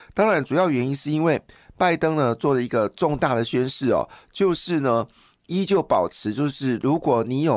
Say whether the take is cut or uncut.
uncut